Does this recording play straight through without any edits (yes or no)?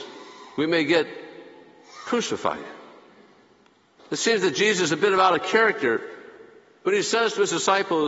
no